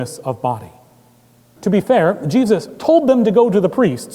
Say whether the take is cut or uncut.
cut